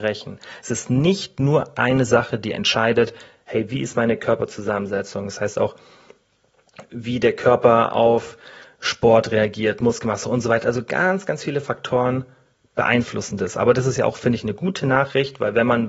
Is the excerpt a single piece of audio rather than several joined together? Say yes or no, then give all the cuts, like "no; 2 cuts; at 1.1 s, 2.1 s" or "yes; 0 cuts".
yes; 0 cuts